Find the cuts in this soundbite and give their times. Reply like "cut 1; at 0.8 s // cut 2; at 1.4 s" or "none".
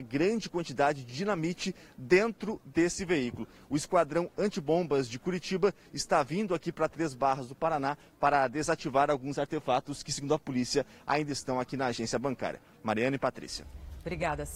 none